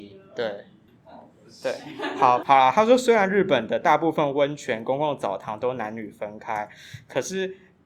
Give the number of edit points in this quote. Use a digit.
1